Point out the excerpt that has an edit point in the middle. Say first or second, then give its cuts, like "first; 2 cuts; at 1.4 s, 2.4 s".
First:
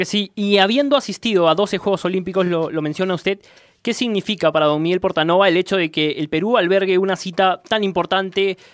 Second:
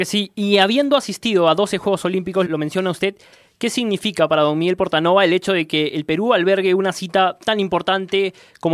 second; 1 cut; at 2.5 s